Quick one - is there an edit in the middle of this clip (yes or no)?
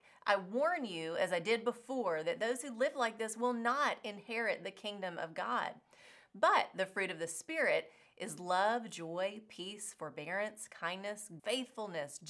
yes